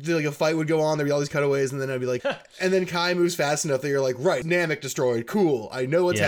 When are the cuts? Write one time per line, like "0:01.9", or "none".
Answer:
0:02.2
0:04.4